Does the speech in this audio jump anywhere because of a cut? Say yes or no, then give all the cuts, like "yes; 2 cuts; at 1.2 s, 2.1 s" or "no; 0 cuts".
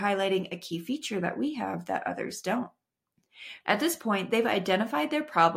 yes; 1 cut; at 3.6 s